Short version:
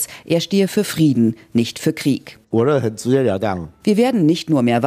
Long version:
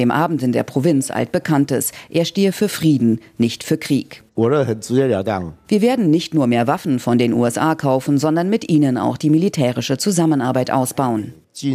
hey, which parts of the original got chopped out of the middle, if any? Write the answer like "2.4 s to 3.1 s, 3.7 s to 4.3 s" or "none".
none

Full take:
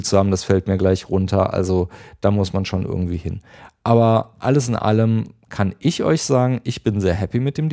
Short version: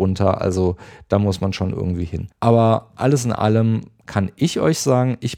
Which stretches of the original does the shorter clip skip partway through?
3.4 s to 3.8 s

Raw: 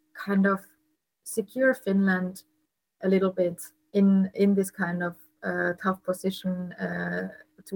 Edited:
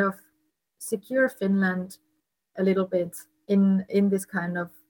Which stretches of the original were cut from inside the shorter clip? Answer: none

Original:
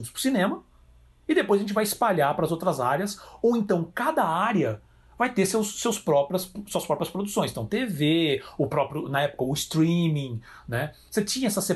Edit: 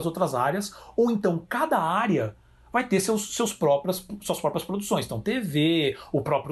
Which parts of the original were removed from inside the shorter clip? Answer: none

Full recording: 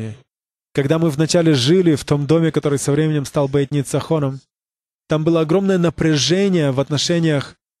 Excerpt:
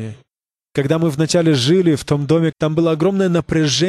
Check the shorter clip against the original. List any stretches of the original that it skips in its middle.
2.5 s to 5.0 s

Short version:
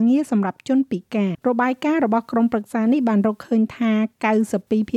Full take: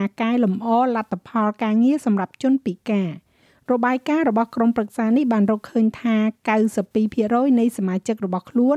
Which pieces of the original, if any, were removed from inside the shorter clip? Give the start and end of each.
3.1 s to 3.6 s

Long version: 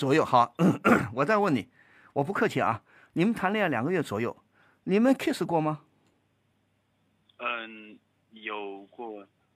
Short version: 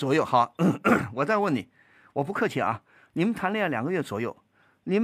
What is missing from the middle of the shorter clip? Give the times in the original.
none

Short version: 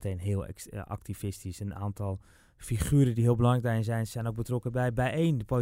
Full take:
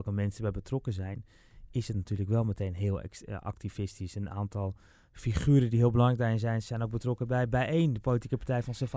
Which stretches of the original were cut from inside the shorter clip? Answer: none

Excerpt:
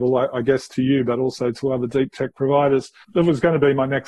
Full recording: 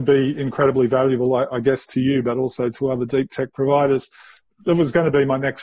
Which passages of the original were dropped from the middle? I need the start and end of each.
4.2 s to 4.5 s

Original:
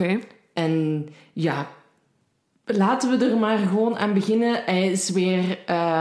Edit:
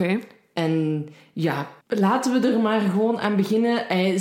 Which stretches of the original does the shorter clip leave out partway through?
1.8 s to 2.6 s

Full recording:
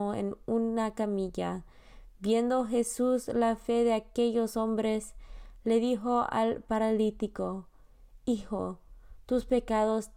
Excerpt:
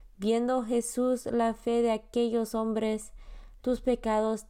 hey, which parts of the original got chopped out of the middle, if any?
5.6 s to 9.2 s

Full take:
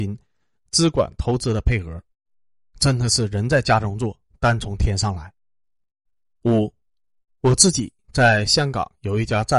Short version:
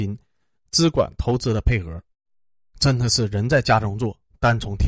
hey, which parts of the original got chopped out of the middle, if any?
none

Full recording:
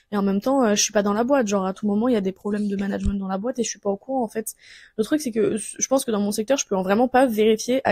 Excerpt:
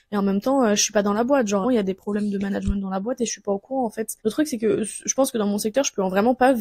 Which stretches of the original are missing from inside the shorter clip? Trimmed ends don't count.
1.6 s to 2.0 s, 4.6 s to 4.9 s

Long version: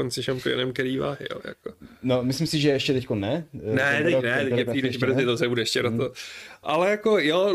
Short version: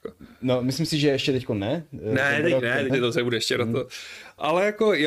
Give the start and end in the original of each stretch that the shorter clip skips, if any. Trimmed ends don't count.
4.5 s to 5.1 s

